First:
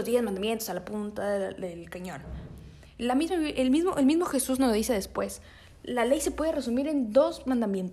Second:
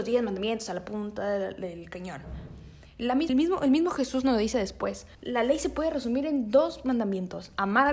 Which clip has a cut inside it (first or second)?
second